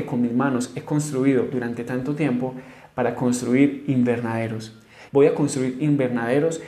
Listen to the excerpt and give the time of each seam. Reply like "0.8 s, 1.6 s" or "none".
5.1 s